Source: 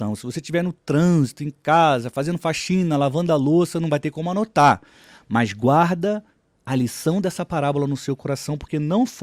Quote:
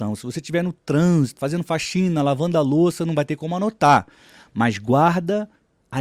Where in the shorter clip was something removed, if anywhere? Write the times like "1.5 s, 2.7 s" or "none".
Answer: 1.4 s